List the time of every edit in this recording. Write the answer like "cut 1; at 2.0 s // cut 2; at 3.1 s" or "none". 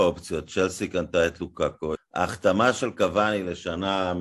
cut 1; at 2.0 s